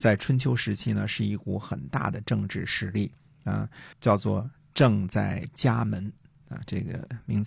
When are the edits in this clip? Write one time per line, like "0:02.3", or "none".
0:03.9